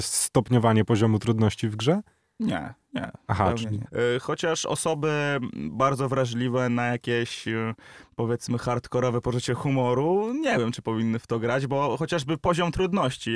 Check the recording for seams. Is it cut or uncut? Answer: cut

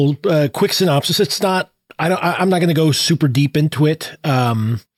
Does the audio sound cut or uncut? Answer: uncut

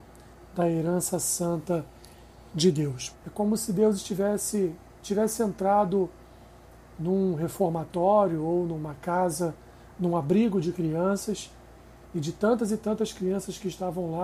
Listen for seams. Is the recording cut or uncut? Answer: cut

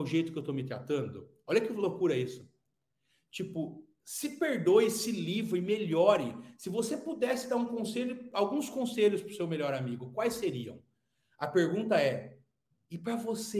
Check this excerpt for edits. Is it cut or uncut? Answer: uncut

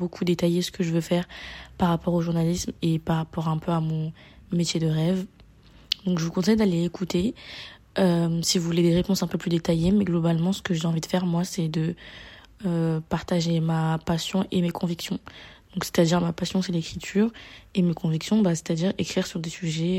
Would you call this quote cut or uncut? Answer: uncut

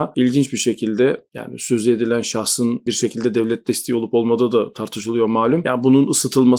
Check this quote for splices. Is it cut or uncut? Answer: uncut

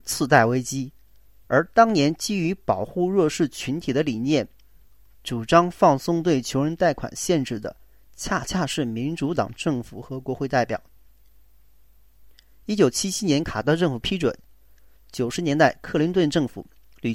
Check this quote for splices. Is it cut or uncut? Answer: uncut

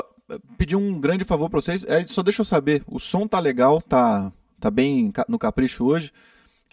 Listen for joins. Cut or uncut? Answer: uncut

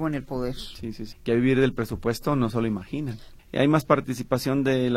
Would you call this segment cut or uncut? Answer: cut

